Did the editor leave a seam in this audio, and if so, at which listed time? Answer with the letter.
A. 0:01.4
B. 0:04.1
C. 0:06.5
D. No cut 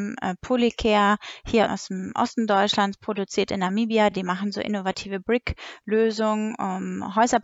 D